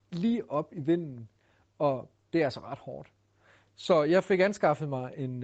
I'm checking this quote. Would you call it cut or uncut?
uncut